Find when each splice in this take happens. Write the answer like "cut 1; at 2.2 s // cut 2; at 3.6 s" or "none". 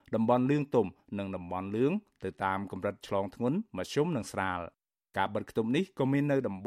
none